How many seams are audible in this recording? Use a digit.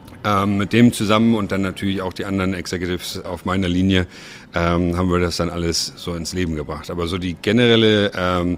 1